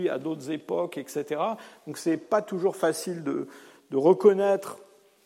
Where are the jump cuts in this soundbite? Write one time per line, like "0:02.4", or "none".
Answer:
none